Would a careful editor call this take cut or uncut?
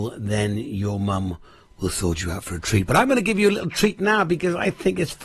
uncut